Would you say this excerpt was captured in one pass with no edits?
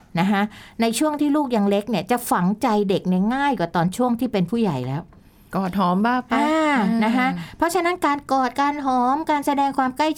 yes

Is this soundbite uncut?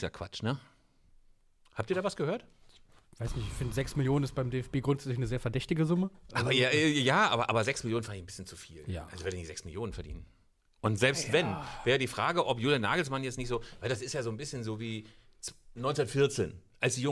yes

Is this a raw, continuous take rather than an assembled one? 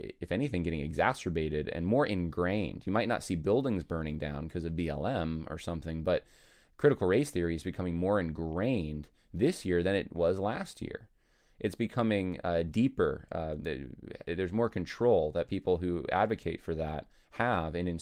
yes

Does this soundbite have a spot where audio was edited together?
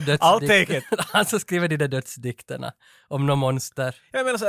no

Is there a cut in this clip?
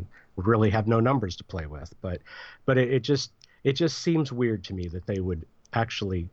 no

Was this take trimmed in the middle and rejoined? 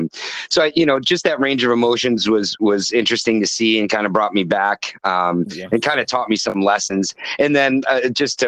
no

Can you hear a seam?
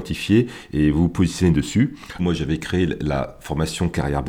yes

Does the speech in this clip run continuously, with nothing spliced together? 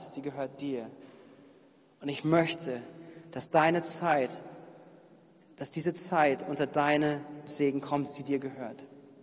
yes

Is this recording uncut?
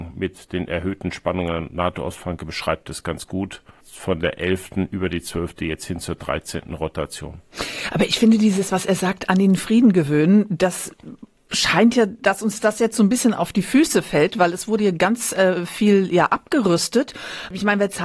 yes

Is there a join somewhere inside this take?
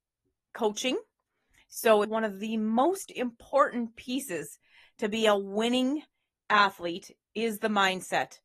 yes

